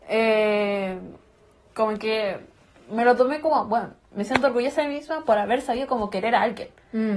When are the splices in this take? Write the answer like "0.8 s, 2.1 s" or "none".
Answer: none